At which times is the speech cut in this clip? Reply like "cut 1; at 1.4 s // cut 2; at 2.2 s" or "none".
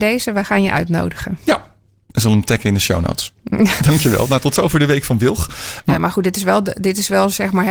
cut 1; at 3.8 s // cut 2; at 5.8 s

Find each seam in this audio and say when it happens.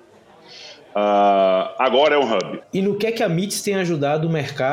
cut 1; at 2.6 s

